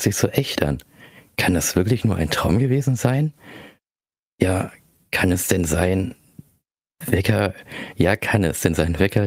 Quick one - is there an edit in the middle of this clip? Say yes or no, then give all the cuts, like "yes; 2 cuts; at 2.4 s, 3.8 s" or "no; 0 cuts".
no; 0 cuts